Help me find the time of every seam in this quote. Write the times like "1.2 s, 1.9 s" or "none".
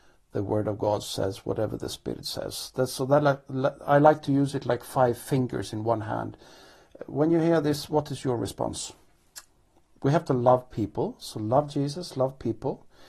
10.0 s